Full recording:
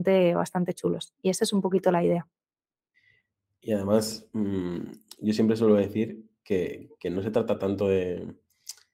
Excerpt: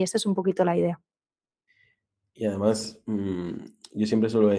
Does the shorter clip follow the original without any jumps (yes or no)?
yes